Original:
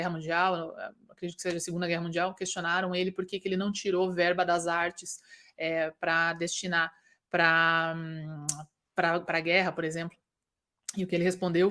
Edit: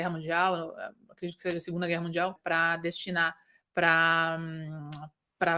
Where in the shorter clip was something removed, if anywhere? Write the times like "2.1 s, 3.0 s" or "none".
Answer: 2.4 s